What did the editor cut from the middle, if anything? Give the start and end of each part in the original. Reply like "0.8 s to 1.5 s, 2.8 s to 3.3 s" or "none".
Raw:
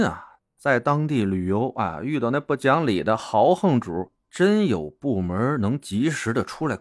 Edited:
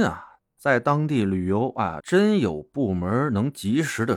2.0 s to 4.3 s